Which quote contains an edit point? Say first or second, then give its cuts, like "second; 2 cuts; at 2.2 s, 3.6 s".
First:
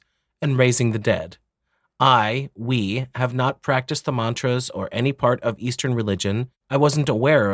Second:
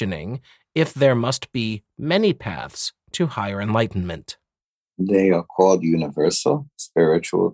first; 1 cut; at 6.6 s